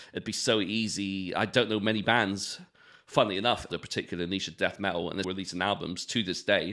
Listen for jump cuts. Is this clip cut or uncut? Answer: cut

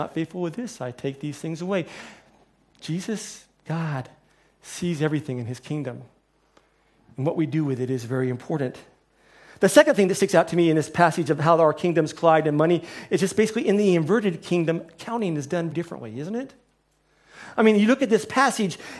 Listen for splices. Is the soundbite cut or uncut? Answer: cut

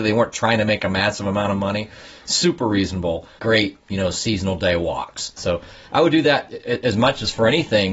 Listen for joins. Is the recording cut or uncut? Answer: cut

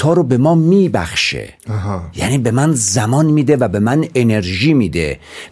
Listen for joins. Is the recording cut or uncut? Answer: cut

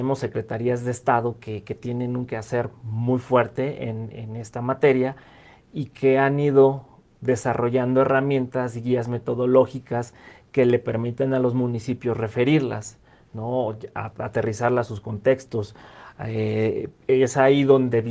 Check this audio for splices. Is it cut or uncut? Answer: uncut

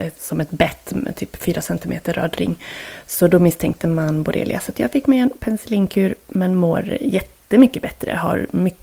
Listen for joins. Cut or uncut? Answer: uncut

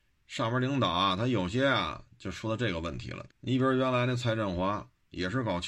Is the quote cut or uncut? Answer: cut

